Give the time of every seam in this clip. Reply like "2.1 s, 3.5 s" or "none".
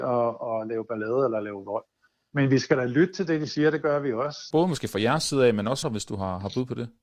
4.5 s, 5.8 s